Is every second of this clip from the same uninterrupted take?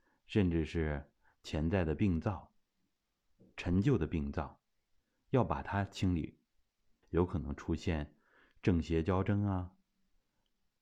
no; 1 cut; at 7.0 s

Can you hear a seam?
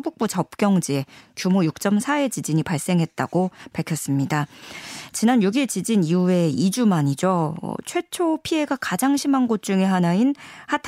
no; 0 cuts

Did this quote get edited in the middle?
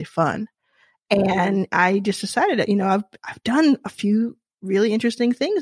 no; 0 cuts

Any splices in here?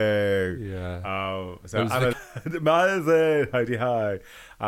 yes; 1 cut; at 2.1 s

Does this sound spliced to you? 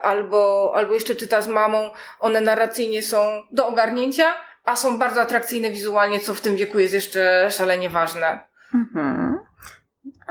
no; 0 cuts

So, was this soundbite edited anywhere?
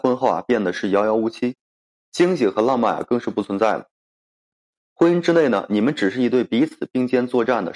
no; 0 cuts

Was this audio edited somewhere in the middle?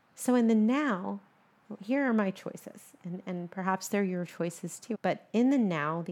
yes; 1 cut; at 4.9 s

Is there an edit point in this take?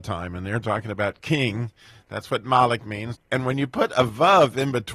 yes; 1 cut; at 3.2 s

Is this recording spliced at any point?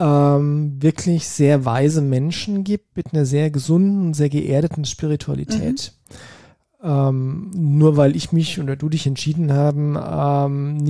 no; 0 cuts

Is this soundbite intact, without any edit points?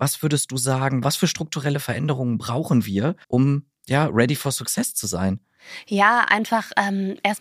no; 1 cut; at 3.2 s

